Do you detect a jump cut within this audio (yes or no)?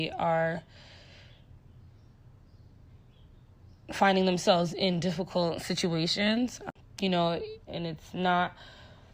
yes